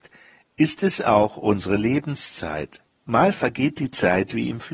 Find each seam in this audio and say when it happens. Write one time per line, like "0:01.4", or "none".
0:03.0